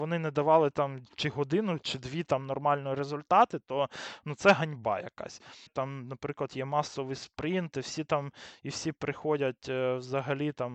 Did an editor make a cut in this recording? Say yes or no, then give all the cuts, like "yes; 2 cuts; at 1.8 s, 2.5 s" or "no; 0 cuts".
yes; 1 cut; at 5.7 s